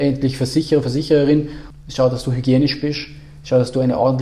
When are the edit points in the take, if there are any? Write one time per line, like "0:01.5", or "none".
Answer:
0:01.7